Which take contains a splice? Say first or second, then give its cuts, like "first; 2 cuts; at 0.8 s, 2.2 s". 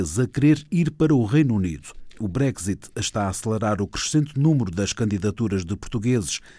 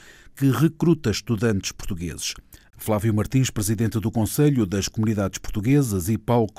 second; 1 cut; at 2.7 s